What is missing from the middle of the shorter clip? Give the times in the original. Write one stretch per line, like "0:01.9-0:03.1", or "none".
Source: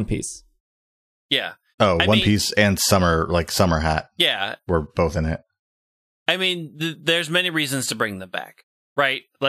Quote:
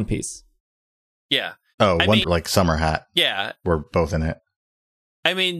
0:02.2-0:03.3